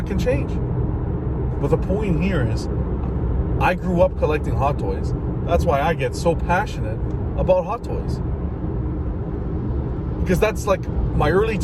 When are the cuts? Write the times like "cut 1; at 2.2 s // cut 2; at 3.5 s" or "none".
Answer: none